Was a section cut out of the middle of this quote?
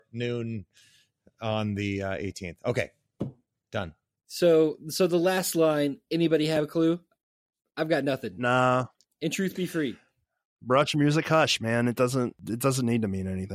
no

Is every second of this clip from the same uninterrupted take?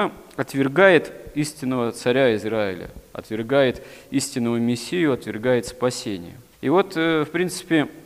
yes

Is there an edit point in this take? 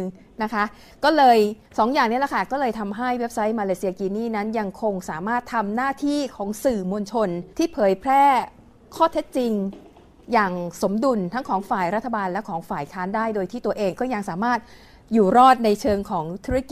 yes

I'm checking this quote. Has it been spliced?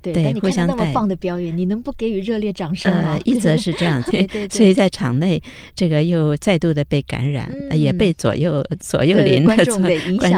yes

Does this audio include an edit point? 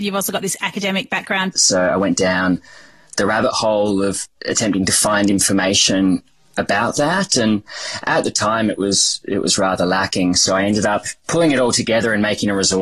yes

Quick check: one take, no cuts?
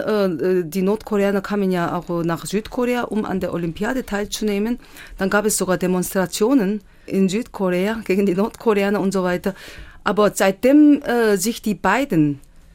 yes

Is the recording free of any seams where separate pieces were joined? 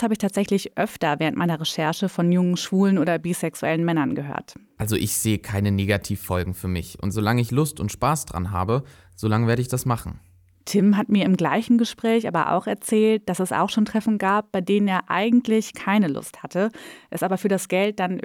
yes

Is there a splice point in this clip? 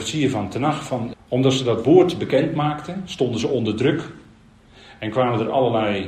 yes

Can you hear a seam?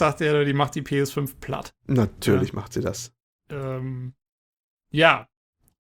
no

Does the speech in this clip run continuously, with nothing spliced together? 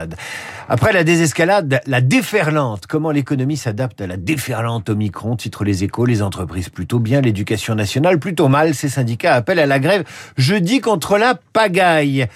yes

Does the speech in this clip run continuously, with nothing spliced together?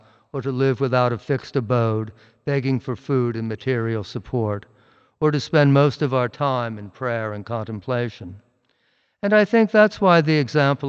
yes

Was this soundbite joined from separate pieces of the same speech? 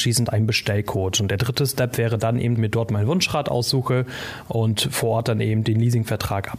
yes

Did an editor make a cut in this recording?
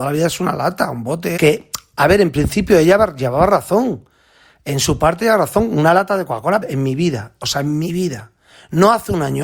yes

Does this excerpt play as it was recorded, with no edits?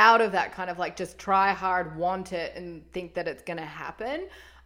yes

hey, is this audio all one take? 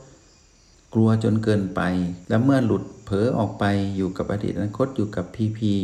yes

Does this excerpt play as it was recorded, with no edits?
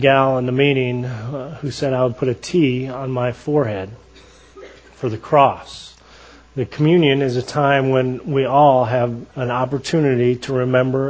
no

